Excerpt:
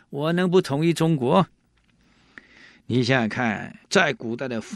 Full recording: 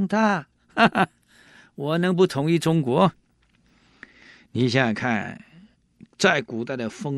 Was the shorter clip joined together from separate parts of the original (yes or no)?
yes